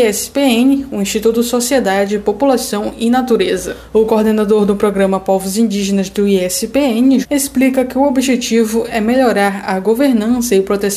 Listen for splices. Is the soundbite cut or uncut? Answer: cut